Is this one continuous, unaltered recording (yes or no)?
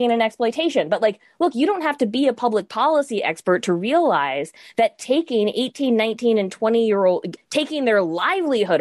no